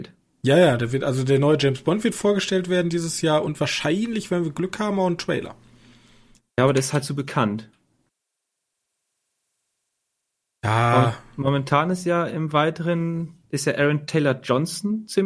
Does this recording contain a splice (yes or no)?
yes